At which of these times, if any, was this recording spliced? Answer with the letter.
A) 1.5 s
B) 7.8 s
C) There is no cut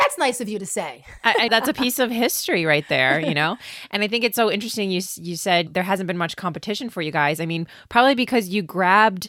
A